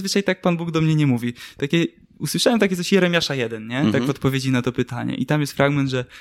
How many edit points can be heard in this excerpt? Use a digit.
0